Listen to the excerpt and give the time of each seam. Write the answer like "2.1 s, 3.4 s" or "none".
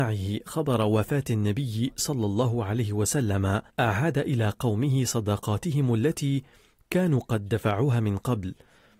3.7 s